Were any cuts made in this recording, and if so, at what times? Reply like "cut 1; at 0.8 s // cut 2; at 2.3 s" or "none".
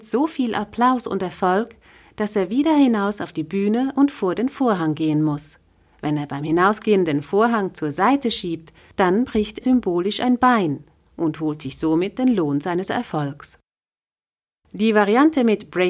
cut 1; at 9.6 s